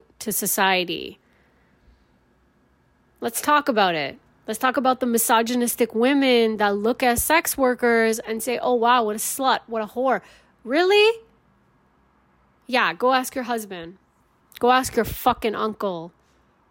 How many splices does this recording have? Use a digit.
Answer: 1